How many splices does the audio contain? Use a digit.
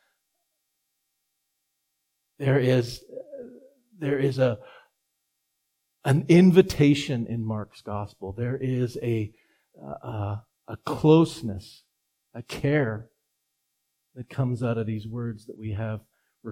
0